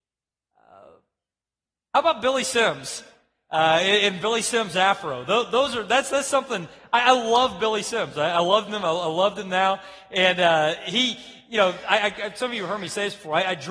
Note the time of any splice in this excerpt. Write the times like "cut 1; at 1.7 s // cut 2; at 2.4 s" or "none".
none